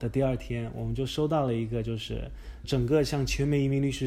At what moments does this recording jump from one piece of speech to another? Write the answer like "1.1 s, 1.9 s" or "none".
2.6 s